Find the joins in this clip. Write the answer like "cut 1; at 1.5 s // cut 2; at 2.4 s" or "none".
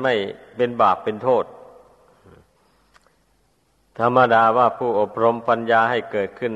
none